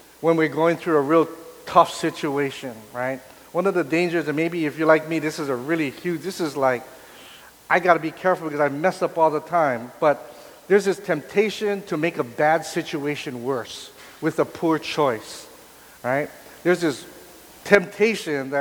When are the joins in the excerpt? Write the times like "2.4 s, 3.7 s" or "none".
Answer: none